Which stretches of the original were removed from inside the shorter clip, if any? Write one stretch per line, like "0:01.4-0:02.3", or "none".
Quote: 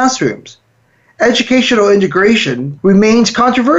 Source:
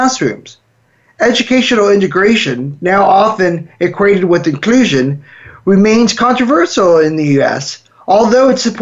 0:02.8-0:05.6